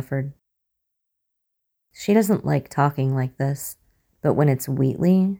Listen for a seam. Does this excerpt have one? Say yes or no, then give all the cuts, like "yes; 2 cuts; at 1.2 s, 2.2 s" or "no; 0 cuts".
no; 0 cuts